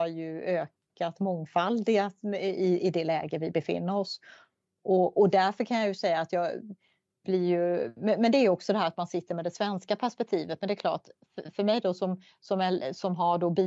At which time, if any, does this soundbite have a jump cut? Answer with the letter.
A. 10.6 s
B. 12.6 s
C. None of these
C